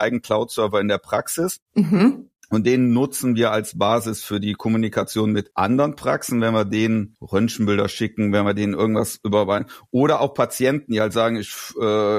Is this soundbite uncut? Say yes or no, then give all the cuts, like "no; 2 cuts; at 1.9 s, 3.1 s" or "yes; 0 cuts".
yes; 0 cuts